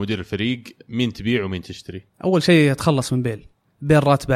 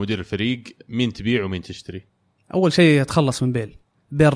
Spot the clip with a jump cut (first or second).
first